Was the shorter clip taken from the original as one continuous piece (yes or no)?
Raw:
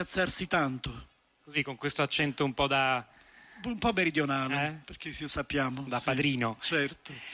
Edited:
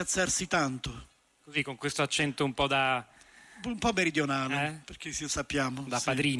yes